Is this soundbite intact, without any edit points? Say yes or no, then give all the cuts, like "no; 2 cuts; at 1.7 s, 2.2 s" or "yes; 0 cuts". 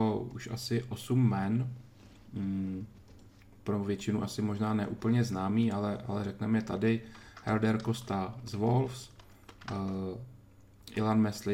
yes; 0 cuts